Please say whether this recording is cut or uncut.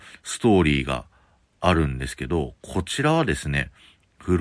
uncut